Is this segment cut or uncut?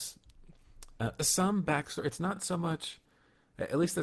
uncut